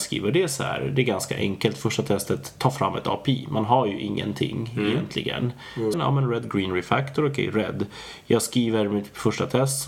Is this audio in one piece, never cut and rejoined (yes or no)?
no